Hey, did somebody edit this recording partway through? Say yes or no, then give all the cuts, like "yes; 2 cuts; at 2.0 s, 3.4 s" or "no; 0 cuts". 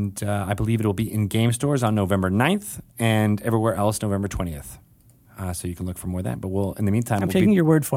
no; 0 cuts